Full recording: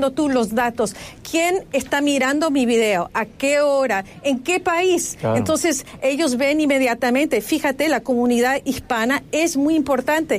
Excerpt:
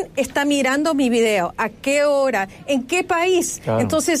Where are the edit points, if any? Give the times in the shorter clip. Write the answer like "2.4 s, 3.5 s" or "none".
none